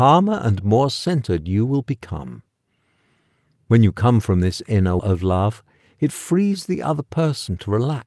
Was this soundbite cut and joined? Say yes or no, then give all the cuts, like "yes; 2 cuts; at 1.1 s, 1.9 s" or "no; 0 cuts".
yes; 1 cut; at 5.0 s